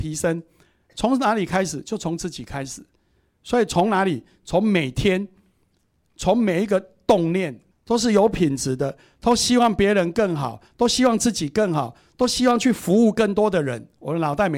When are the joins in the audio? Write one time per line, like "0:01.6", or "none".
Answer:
0:07.7